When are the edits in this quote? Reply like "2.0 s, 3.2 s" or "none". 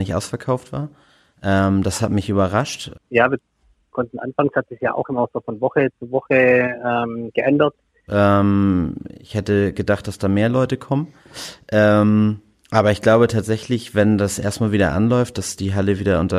2.9 s, 8.1 s